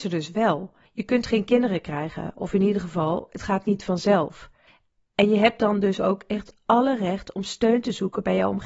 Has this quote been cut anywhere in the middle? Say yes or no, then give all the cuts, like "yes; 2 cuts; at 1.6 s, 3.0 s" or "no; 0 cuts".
no; 0 cuts